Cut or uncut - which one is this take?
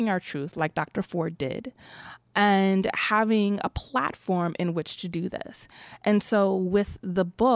uncut